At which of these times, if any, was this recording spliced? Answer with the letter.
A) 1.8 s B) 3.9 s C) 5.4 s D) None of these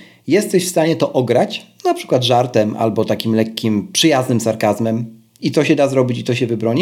C